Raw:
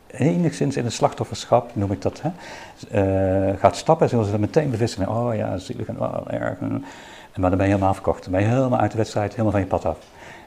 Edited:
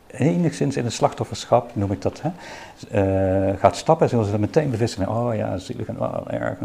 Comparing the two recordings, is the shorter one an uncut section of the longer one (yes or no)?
yes